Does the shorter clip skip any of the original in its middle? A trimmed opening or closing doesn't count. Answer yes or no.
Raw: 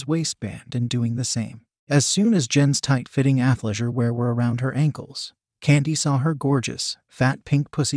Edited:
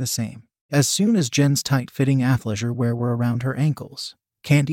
no